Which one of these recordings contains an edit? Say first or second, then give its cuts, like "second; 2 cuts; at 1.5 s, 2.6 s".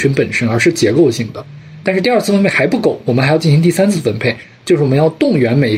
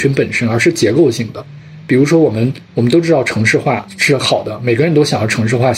first; 1 cut; at 1.8 s